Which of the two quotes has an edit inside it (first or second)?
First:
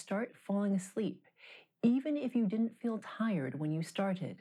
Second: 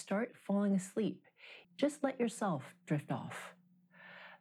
second